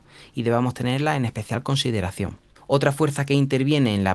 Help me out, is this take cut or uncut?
cut